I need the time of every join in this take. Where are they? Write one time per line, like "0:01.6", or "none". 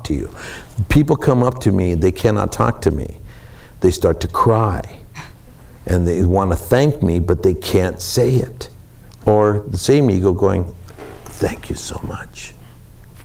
0:09.1